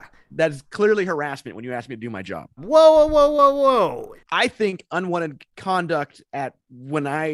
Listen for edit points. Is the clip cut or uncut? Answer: cut